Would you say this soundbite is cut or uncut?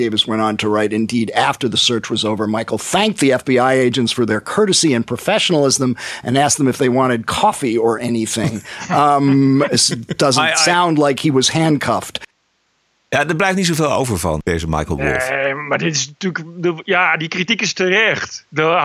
uncut